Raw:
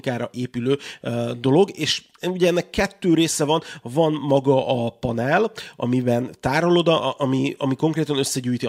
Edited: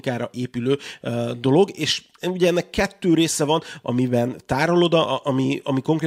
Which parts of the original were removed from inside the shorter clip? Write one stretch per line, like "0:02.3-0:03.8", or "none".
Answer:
0:03.8-0:05.8